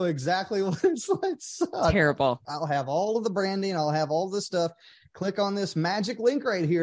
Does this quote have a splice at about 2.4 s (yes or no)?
yes